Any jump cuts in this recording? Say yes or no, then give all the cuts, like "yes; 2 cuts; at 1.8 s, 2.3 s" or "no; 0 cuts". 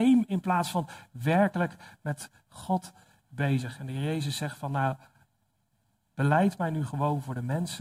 no; 0 cuts